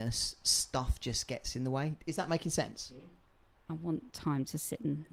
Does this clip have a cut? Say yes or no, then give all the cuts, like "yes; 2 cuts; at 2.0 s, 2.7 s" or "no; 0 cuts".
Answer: yes; 1 cut; at 3.7 s